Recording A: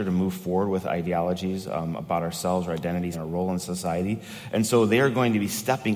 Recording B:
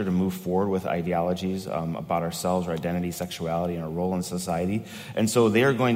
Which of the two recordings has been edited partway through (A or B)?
A